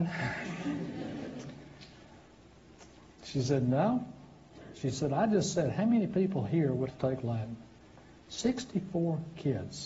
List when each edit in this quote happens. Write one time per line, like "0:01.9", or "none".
0:06.9